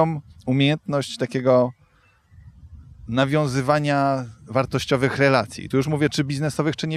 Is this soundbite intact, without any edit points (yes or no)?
yes